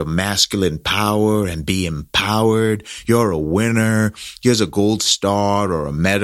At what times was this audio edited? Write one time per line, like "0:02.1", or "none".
none